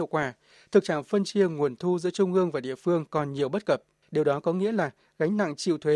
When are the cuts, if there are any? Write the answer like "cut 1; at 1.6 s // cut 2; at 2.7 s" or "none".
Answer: cut 1; at 4.1 s